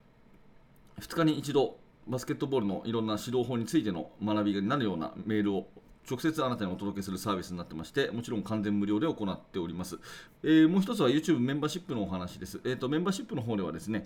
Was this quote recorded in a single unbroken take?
no; 1 cut; at 10.3 s

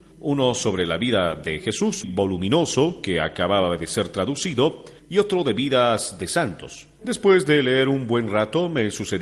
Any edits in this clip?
yes; 2 cuts; at 2.0 s, 7.0 s

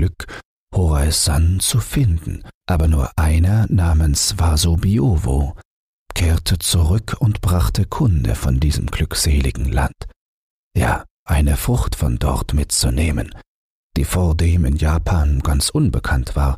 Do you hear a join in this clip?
yes; 3 cuts; at 2.6 s, 11.3 s, 13.8 s

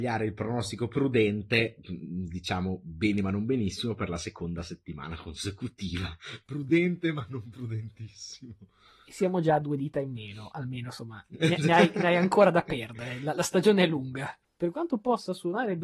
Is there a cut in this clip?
yes; 1 cut; at 14.4 s

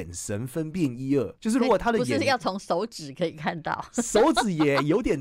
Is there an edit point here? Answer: yes; 1 cut; at 1.4 s

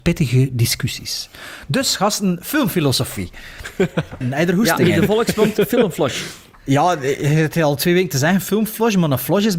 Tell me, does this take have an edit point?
yes; 1 cut; at 4.2 s

